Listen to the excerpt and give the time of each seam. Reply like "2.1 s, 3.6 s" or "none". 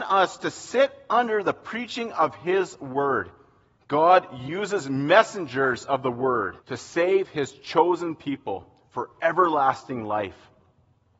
3.8 s, 6.6 s

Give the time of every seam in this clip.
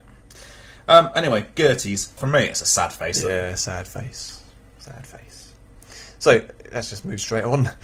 2.2 s

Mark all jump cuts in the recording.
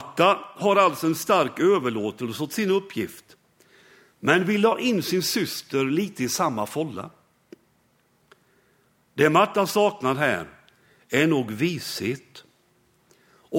none

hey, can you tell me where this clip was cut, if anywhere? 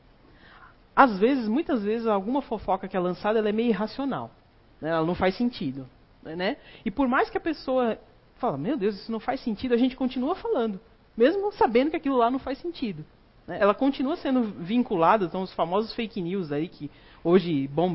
none

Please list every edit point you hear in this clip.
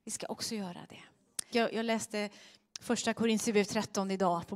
1.5 s

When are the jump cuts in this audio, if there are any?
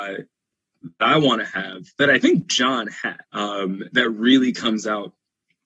3.2 s

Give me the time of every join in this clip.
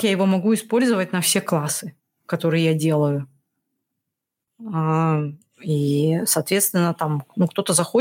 4.5 s

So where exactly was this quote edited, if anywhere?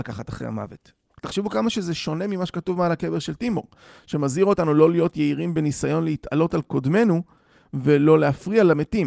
1.1 s

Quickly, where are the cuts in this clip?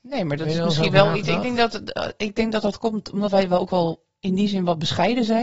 none

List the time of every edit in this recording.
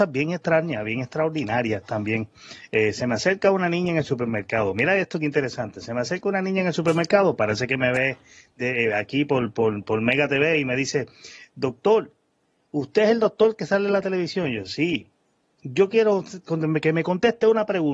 none

